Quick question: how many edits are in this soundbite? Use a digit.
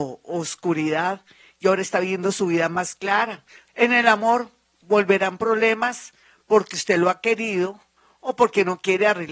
1